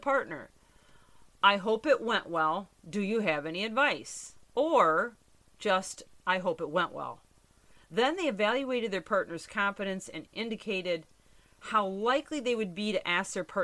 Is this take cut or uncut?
uncut